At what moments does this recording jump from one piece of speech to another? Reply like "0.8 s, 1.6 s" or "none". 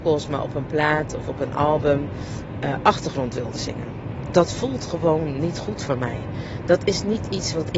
none

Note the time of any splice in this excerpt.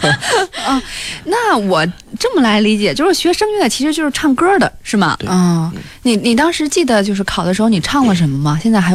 5.2 s

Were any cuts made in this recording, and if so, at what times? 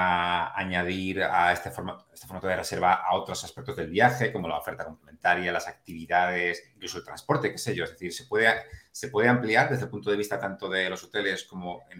none

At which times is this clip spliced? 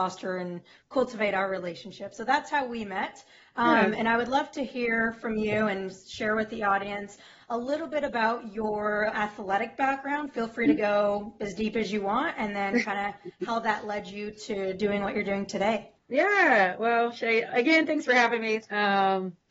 9.1 s, 16.0 s

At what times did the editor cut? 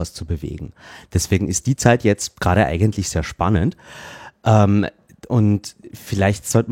none

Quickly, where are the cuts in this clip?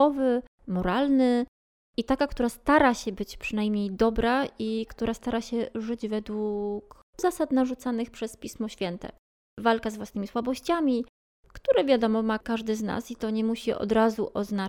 7.1 s

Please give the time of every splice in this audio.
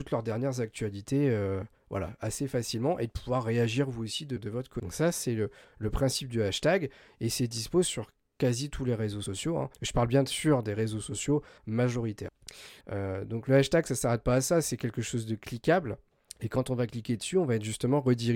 9.7 s, 12.8 s

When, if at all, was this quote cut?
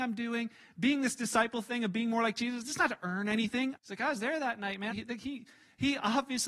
3.8 s, 4.9 s

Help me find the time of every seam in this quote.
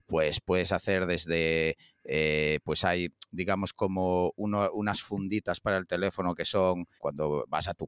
7.0 s

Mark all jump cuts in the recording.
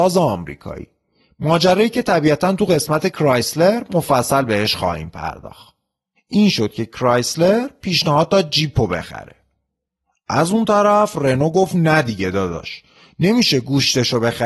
6.1 s

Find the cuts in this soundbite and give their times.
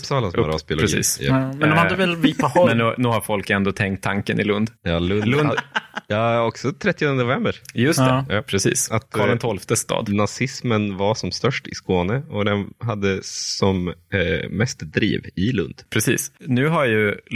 none

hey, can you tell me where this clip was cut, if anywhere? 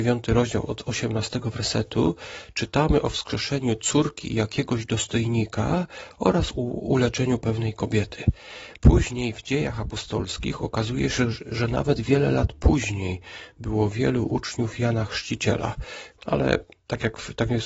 8.8 s, 16.2 s

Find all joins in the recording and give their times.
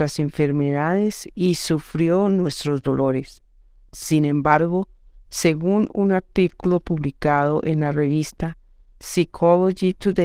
3.9 s

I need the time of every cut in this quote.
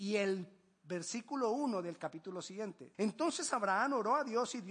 2.9 s

